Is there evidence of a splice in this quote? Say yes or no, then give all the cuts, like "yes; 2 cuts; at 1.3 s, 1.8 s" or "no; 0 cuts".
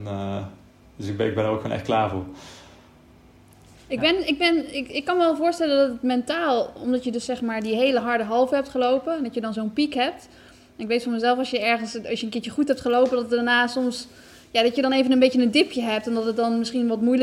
no; 0 cuts